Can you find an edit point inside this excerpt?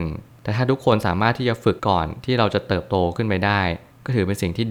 yes; 1 cut; at 1.8 s

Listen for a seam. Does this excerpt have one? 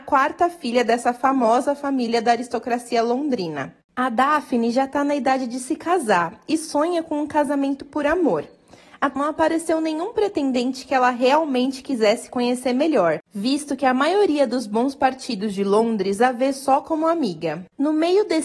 yes; 1 cut; at 9.2 s

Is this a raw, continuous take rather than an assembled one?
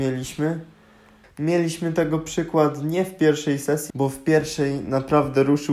no; 2 cuts; at 1.2 s, 3.9 s

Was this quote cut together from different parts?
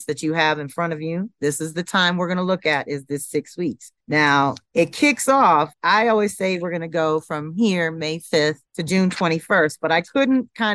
yes; 1 cut; at 1.4 s

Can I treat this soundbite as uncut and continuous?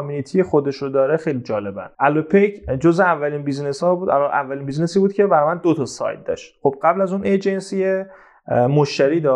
no; 1 cut; at 1.9 s

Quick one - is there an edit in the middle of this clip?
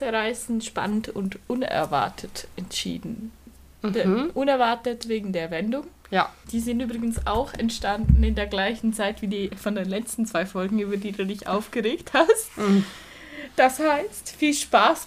yes; 1 cut; at 6.4 s

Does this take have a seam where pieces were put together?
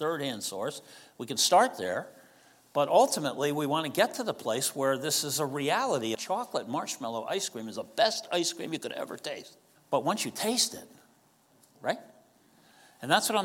yes; 3 cuts; at 6.1 s, 9.8 s, 11.7 s

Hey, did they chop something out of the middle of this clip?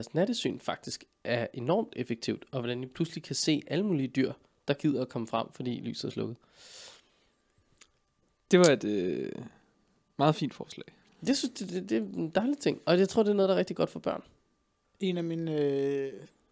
yes; 1 cut; at 14.8 s

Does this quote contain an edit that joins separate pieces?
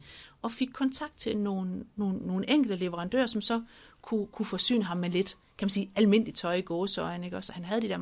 no; 0 cuts

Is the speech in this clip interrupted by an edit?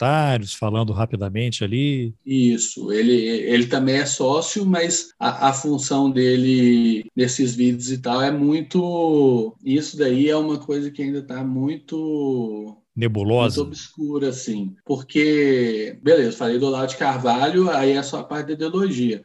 yes; 1 cut; at 9.6 s

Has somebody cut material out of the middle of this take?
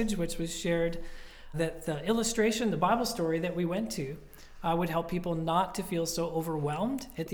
yes; 1 cut; at 1.5 s

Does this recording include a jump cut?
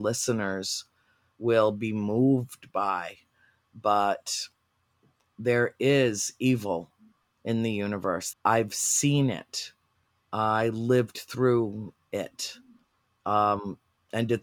yes; 1 cut; at 8.3 s

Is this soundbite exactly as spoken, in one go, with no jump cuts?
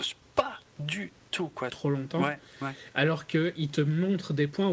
no; 1 cut; at 1.7 s

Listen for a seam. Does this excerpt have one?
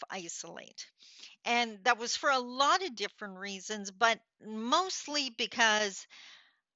no; 0 cuts

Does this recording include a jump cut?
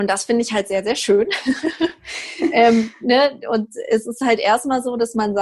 no; 0 cuts

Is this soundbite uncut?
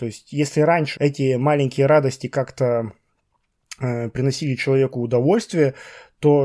no; 1 cut; at 1.0 s

